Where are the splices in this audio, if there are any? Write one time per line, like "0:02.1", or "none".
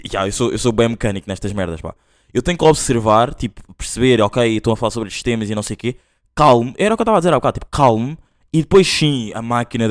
none